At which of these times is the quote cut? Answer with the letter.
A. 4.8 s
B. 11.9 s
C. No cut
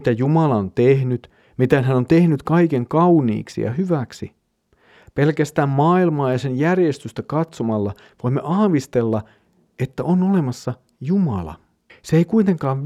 B